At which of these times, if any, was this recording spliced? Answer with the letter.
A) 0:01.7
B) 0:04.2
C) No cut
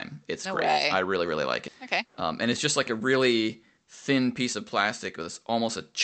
A